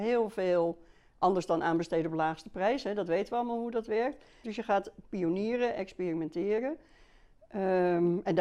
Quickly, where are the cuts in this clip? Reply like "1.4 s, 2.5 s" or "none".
4.4 s